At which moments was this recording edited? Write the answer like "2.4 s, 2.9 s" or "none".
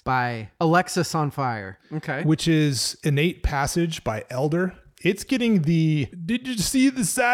1.8 s